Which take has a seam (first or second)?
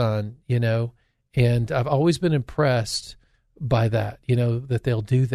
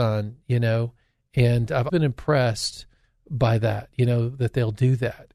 second